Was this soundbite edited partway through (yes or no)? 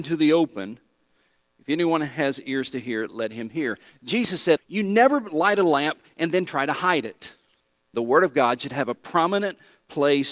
yes